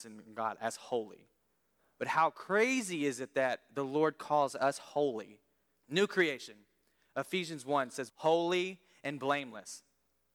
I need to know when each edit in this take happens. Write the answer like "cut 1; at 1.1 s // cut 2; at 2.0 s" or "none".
cut 1; at 5.8 s // cut 2; at 8.1 s